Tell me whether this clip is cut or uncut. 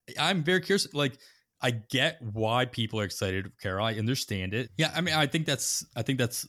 cut